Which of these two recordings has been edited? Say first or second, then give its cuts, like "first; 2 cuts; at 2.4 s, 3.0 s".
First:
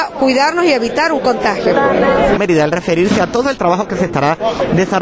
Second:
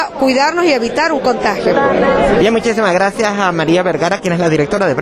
first; 1 cut; at 2.4 s